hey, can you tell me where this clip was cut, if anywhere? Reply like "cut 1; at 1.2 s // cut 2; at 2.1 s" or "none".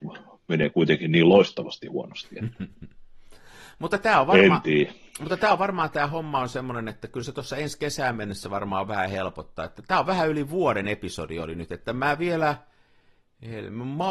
none